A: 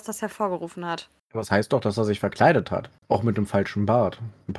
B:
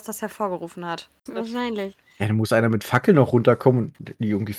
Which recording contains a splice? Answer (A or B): B